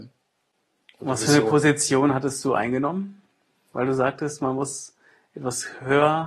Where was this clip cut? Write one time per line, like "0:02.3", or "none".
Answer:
none